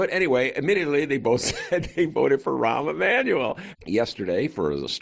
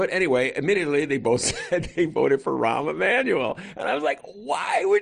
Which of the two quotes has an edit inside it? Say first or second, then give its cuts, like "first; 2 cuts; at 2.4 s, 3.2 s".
first; 1 cut; at 3.7 s